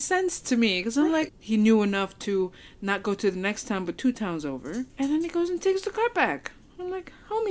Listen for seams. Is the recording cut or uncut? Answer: cut